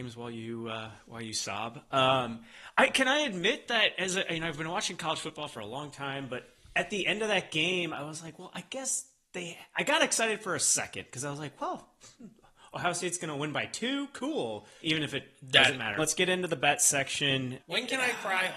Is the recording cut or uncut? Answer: cut